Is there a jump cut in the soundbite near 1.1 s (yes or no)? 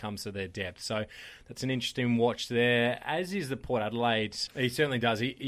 no